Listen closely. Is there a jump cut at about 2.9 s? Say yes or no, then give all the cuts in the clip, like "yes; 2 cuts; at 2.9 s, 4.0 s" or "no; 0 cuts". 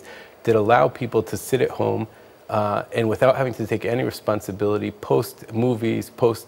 no; 0 cuts